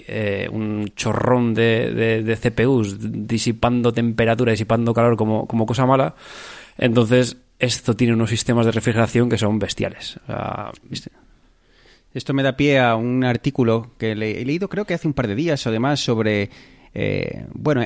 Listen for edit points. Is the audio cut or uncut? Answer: uncut